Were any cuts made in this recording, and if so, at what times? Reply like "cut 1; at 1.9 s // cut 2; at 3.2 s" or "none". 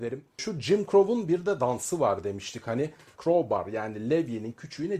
cut 1; at 3.1 s